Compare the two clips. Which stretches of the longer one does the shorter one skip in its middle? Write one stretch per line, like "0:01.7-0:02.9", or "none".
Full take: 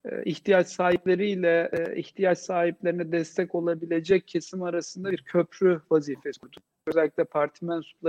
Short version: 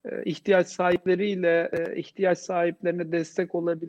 none